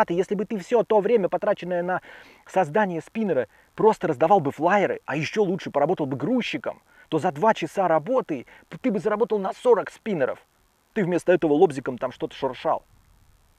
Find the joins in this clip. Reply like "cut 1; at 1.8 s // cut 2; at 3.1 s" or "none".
none